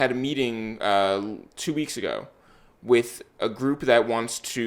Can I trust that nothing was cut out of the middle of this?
yes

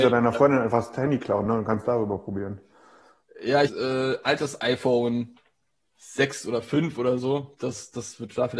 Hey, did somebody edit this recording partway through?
yes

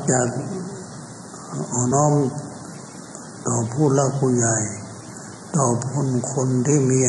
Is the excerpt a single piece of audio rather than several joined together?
no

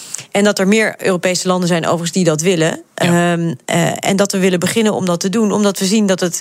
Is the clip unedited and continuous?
yes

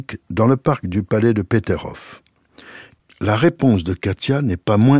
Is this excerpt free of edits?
no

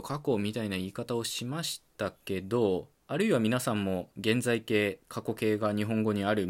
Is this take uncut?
no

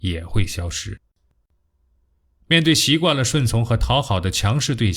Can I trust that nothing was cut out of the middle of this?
yes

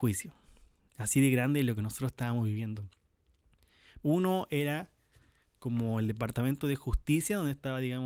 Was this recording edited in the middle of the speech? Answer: yes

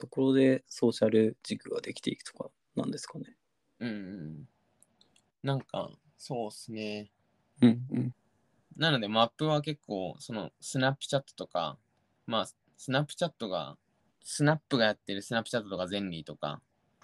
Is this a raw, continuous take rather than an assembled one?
no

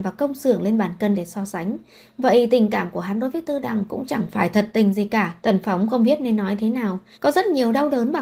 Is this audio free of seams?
no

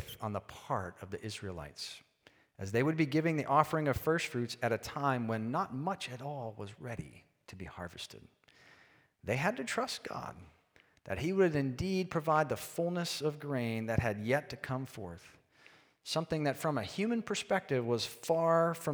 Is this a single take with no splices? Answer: yes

